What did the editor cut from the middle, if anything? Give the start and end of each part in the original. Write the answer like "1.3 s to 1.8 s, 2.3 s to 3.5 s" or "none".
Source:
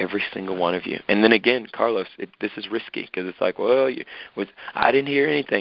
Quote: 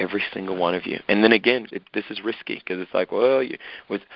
1.7 s to 2.2 s